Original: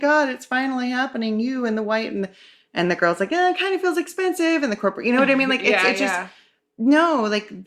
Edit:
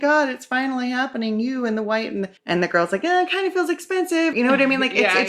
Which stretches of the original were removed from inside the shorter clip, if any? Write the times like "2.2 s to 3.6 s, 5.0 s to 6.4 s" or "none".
2.4 s to 2.6 s, 4.6 s to 5.0 s